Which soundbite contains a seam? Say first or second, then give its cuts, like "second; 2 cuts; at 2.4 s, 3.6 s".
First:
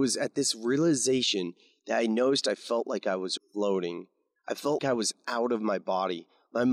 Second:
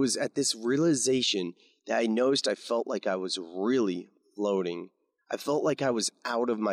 first; 2 cuts; at 3.4 s, 4.8 s